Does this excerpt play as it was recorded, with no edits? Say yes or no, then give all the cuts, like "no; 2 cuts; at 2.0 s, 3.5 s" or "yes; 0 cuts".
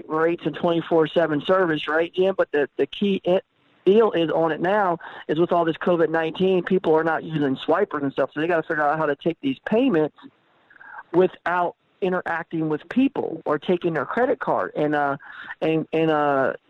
yes; 0 cuts